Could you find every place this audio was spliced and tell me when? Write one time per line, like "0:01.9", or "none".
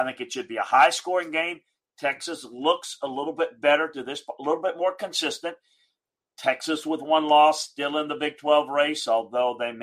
none